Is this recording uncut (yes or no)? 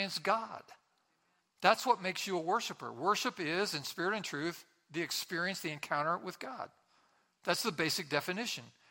yes